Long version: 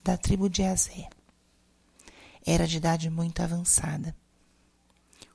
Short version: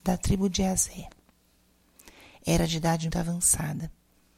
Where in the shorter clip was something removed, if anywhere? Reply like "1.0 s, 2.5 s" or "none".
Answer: 3.1 s